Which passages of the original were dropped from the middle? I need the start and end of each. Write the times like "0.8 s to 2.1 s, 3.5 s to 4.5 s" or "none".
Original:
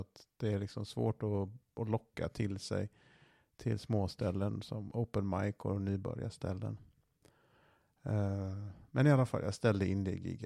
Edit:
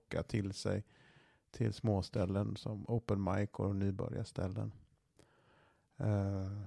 none